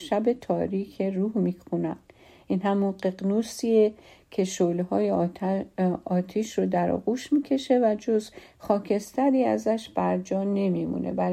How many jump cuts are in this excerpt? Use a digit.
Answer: 0